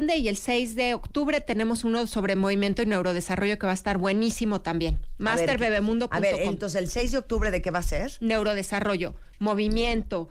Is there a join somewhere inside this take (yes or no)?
no